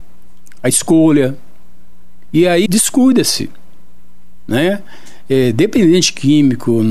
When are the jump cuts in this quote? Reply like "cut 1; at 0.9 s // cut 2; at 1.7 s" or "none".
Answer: cut 1; at 2.7 s